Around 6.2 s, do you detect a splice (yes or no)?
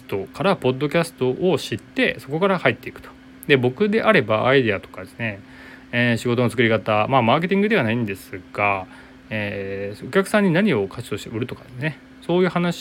no